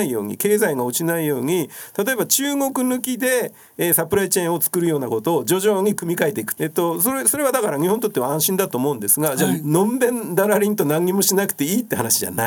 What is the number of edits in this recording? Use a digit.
1